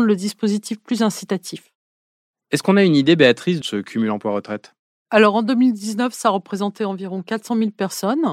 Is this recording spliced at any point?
yes; 1 cut; at 3.6 s

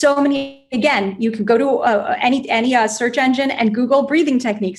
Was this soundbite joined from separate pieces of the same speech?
no; 0 cuts

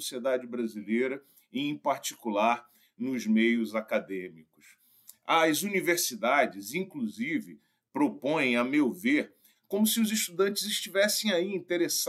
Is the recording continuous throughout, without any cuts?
no; 1 cut; at 9.6 s

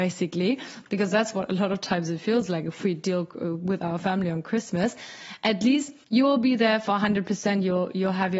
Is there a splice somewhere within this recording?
yes; 1 cut; at 6.0 s

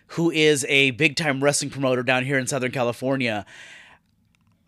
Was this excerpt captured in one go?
yes; 0 cuts

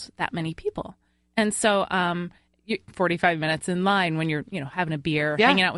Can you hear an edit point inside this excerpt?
yes; 1 cut; at 2.9 s

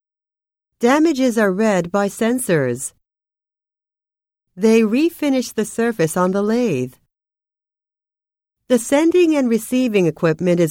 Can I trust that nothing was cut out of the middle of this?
yes; 0 cuts

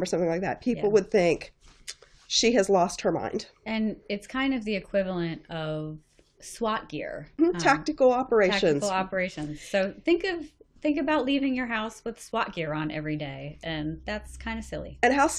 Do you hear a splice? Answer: yes; 1 cut; at 7.4 s

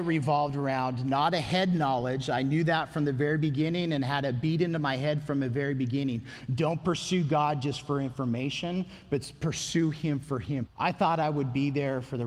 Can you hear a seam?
yes; 1 cut; at 10.7 s

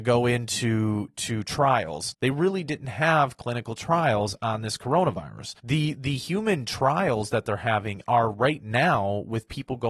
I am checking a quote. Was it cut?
yes; 2 cuts; at 2.1 s, 5.6 s

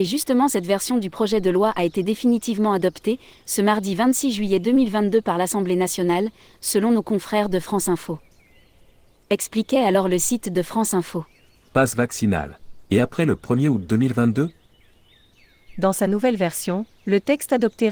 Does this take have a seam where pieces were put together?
yes; 2 cuts; at 9.2 s, 11.6 s

